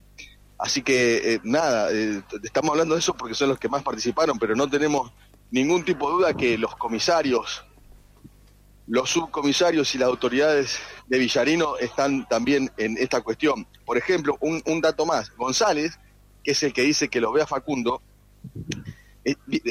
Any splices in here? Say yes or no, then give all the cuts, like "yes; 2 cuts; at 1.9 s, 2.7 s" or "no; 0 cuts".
no; 0 cuts